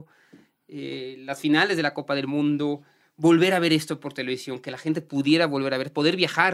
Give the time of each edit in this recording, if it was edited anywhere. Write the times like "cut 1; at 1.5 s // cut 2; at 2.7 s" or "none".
none